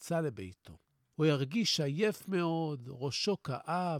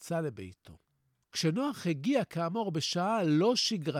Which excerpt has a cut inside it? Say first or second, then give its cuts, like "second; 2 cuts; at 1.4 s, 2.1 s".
first; 1 cut; at 1.0 s